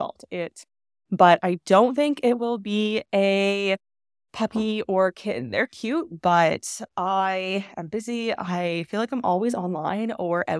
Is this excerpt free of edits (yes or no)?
no